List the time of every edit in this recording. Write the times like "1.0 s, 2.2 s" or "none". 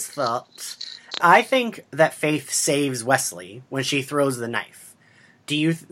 1.2 s